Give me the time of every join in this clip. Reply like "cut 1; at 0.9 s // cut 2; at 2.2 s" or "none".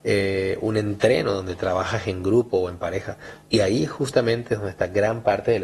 cut 1; at 3.4 s